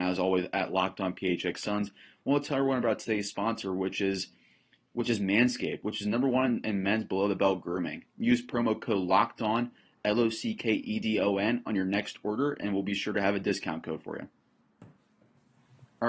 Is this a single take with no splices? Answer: yes; 0 cuts

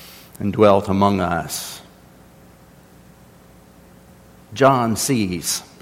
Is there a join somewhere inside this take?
no; 0 cuts

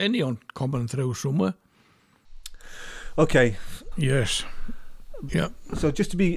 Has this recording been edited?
yes; 2 cuts; at 3.9 s, 5.3 s

